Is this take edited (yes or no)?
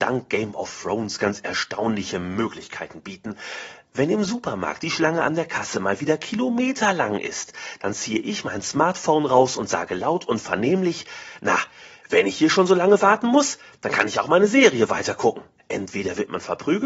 yes